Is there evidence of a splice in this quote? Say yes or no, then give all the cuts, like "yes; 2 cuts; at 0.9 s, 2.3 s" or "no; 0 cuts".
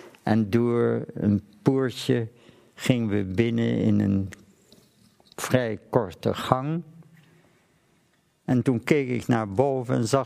no; 0 cuts